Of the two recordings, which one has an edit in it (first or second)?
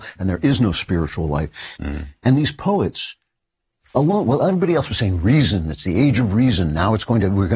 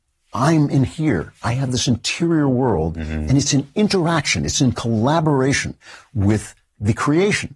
first